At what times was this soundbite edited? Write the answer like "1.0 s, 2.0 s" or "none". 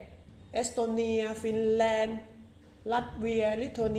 none